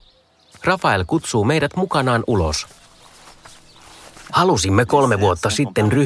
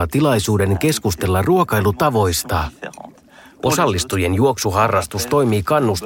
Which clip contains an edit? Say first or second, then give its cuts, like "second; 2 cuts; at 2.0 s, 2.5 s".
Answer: first; 1 cut; at 4.3 s